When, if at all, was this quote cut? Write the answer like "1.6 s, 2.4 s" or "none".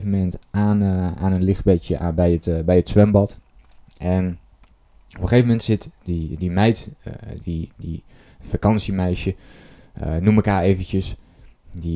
none